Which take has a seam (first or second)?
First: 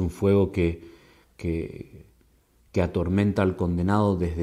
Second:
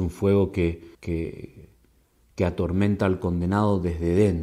second